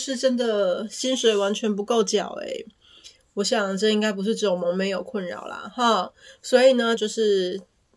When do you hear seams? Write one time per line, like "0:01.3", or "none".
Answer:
0:07.0